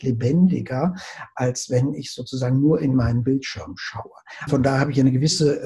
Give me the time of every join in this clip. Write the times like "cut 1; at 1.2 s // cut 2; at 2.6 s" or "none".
cut 1; at 4.5 s